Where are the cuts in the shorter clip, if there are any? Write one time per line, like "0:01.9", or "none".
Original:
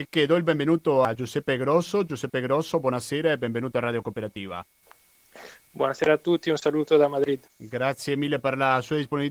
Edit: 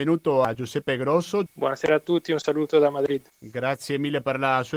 0:01.5